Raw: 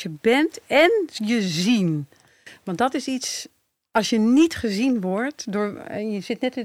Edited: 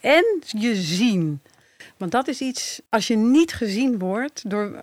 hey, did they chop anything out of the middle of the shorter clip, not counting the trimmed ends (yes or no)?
yes